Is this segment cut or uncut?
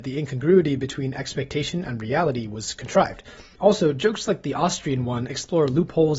cut